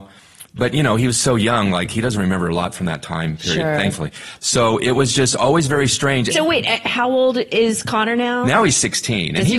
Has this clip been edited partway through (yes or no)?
yes